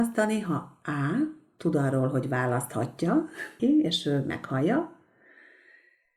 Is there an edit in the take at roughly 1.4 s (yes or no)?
no